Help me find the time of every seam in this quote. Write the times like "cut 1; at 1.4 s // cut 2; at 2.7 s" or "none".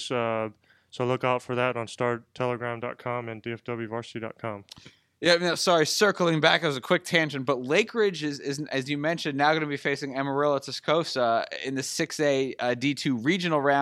none